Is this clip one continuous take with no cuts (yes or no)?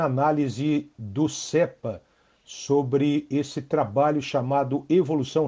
yes